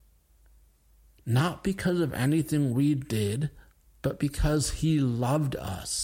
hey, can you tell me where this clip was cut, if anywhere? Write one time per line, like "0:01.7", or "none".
0:04.0